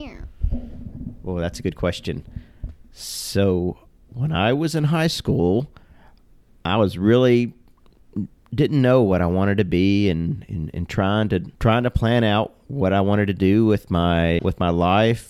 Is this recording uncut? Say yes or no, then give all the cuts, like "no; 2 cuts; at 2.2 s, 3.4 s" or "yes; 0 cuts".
no; 2 cuts; at 11.5 s, 14.4 s